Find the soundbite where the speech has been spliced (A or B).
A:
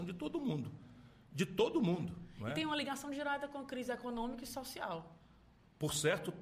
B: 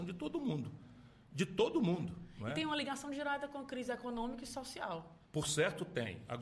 B